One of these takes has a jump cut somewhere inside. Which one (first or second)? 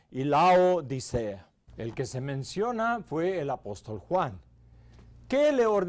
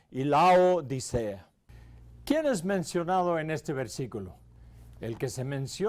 first